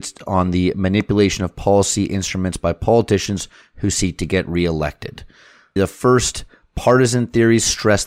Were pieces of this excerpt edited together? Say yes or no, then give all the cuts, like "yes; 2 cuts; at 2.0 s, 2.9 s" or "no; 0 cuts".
yes; 1 cut; at 5.8 s